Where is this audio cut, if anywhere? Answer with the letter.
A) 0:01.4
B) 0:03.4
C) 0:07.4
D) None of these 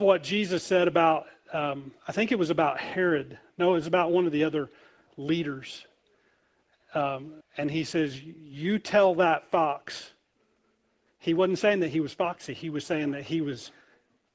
C